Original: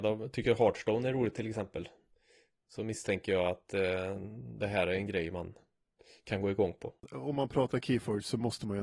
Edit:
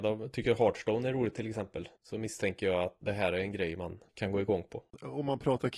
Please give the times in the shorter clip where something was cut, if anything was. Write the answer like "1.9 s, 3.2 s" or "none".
2.0 s, 3.0 s, 4.1 s